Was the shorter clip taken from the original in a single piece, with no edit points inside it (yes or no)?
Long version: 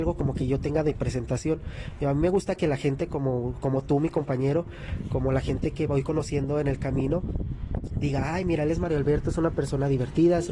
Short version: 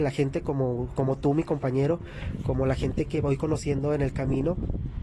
yes